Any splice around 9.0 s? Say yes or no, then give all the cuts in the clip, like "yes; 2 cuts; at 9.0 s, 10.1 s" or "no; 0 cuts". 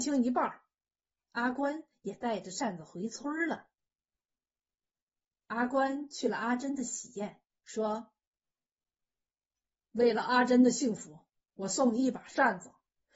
no; 3 cuts; at 1.1 s, 5.3 s, 7.6 s